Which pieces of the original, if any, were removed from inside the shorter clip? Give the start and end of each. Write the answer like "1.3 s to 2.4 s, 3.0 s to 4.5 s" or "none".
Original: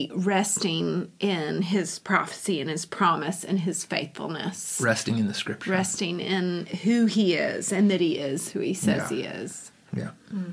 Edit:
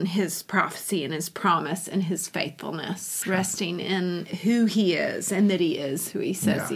4.8 s to 5.6 s